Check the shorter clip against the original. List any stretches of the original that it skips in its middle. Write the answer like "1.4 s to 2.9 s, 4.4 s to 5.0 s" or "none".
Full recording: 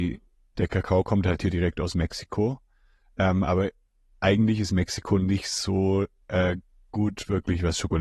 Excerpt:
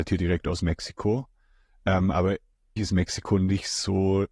4.1 s to 4.6 s